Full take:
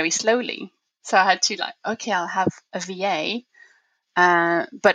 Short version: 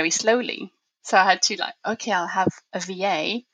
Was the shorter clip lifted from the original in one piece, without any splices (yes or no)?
yes